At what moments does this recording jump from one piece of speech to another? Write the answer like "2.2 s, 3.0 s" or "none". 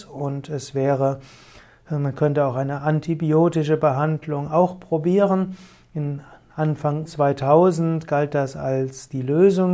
7.0 s

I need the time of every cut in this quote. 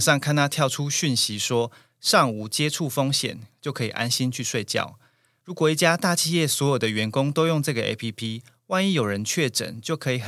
5.4 s

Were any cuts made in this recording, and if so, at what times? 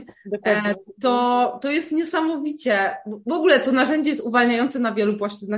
none

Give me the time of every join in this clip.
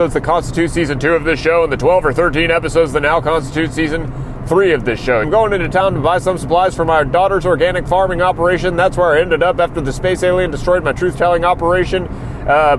5.2 s

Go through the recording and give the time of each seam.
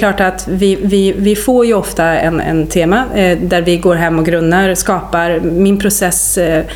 none

